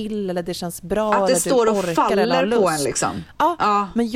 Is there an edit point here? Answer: no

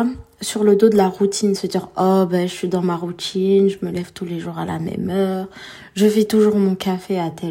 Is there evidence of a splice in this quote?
no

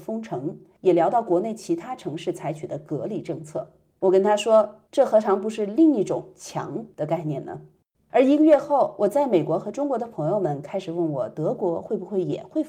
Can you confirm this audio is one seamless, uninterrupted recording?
yes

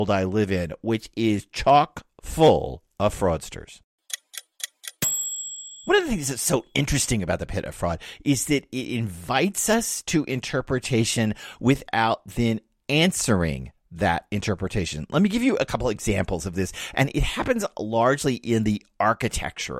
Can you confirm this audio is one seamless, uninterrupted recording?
yes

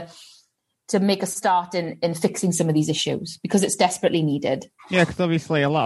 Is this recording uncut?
no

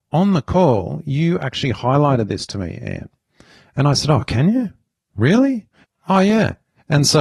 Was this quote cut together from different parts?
no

